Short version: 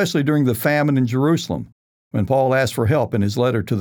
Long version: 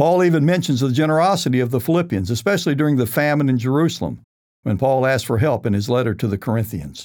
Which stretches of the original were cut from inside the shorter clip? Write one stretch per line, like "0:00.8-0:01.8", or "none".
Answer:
none

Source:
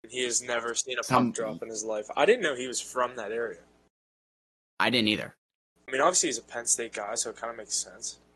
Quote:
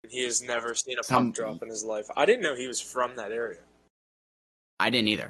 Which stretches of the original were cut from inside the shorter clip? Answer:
none

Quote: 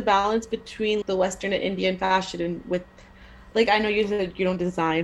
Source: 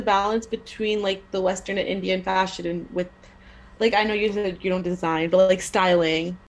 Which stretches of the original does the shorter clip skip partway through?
0:01.0-0:01.3

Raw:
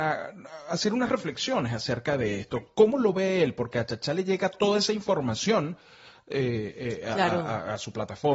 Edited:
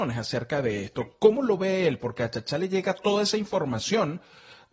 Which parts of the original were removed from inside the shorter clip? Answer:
none

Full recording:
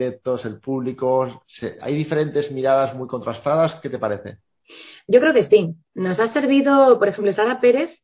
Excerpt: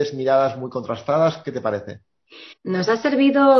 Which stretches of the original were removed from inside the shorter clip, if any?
0:04.9-0:05.8

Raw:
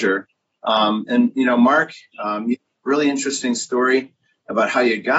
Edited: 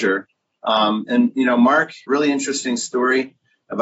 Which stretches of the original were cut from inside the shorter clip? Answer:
0:02.0-0:02.8

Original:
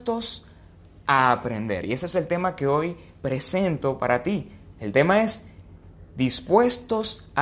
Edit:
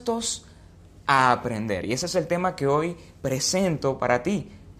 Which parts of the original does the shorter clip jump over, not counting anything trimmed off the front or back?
none

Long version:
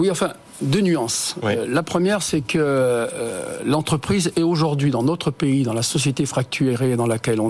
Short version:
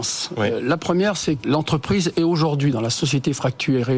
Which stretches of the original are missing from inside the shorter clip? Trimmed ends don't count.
0:02.5-0:03.6
0:04.9-0:05.6

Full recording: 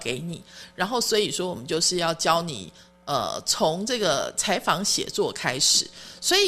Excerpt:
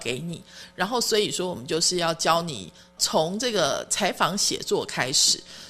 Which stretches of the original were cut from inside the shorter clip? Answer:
0:03.0-0:03.4

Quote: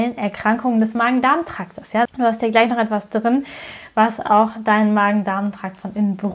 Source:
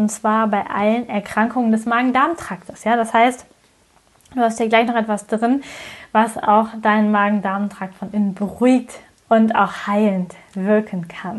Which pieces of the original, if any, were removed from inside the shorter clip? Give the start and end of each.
0:03.0-0:04.2

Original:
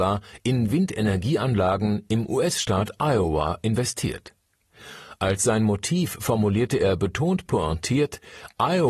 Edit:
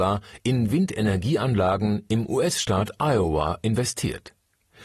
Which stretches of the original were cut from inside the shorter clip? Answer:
none

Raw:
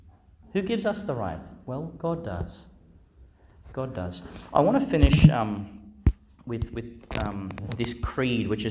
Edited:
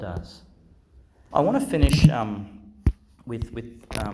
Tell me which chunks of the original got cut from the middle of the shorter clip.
0:03.5-0:04.5

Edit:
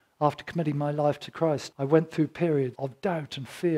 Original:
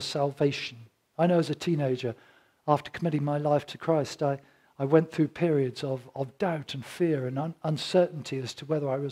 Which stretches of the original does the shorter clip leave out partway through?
0:04.2-0:04.7
0:05.7-0:06.1

